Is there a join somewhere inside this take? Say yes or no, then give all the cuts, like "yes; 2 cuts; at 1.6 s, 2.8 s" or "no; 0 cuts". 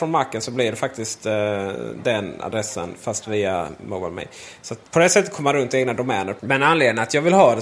yes; 2 cuts; at 4.9 s, 6.4 s